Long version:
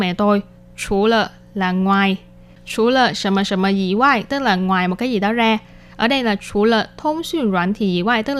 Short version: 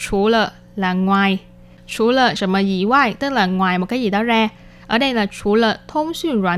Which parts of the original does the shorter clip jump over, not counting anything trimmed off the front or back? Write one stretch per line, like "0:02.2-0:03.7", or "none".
0:03.1-0:03.5